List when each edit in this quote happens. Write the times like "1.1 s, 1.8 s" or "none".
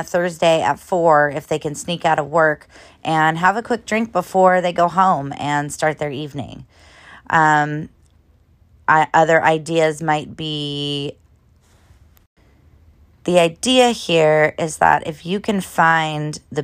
none